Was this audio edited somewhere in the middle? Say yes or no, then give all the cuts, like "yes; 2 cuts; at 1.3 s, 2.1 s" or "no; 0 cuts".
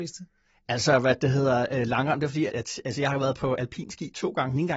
yes; 1 cut; at 2.5 s